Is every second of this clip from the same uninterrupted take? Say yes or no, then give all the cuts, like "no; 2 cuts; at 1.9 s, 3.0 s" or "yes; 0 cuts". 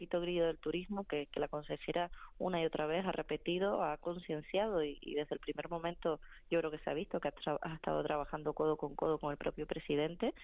yes; 0 cuts